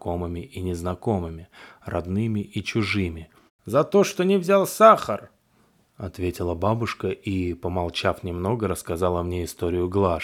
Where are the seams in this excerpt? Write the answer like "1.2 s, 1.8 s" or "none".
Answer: 3.5 s